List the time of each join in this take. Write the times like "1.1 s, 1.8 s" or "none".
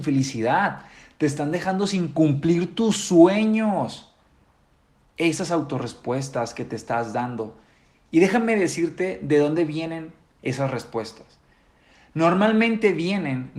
none